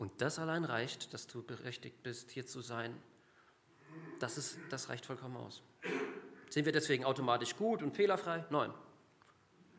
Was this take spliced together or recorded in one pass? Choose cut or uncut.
uncut